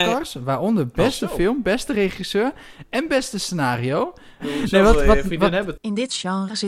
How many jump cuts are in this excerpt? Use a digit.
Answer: 2